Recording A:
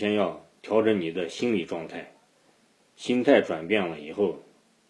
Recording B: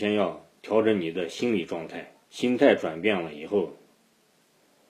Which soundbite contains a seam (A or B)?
B